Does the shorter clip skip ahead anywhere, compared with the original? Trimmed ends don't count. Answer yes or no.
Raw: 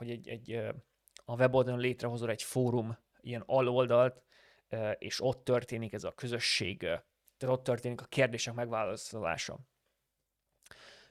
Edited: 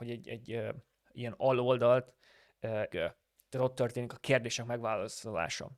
yes